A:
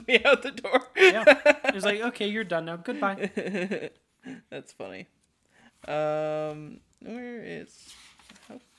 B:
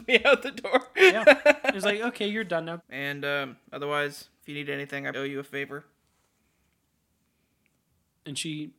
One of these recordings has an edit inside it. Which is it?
B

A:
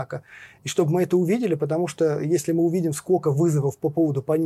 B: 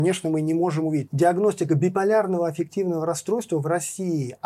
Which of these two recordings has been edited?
B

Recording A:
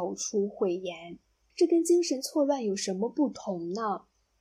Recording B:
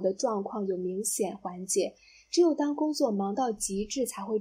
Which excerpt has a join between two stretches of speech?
A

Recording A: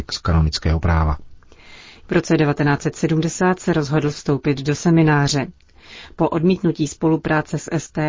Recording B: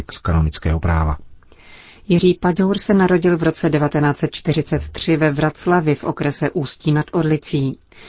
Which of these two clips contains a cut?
A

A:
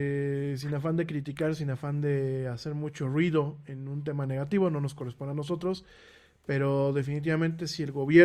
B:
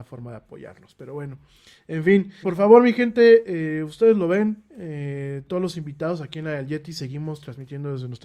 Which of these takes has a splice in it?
B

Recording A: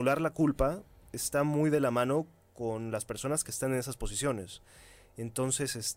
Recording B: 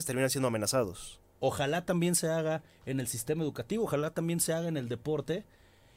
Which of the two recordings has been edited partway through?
B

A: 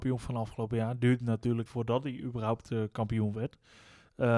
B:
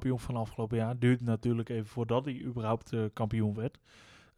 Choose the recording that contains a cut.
A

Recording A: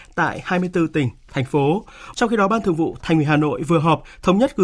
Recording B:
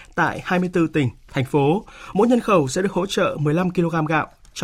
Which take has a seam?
A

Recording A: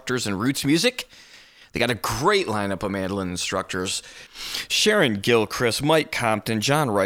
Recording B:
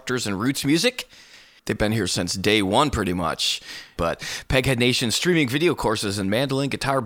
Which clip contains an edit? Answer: B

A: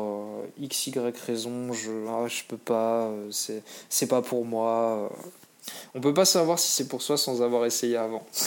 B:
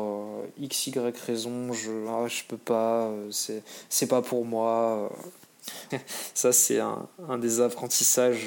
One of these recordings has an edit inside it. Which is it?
B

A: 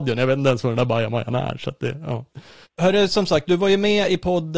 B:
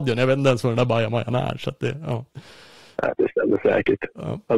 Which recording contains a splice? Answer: A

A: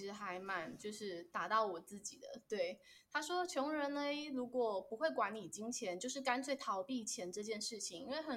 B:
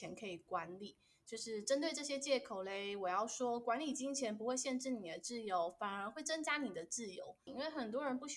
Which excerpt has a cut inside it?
B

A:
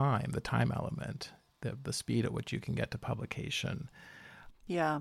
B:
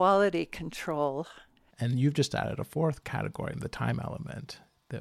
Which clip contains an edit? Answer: B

